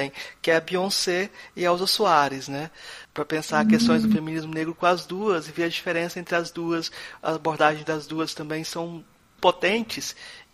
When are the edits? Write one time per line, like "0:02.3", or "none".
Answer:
0:03.0
0:09.4